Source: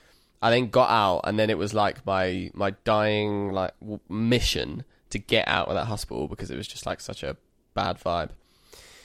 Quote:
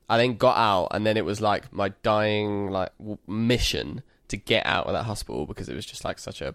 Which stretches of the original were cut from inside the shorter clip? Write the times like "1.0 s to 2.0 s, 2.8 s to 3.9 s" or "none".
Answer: 2.0 s to 2.5 s